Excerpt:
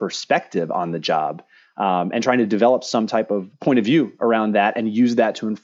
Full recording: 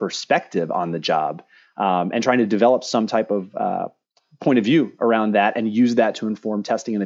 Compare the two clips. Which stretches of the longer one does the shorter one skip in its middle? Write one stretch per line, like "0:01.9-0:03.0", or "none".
0:03.5-0:04.3